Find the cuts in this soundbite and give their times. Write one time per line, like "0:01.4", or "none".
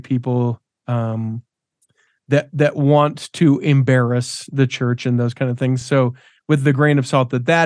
none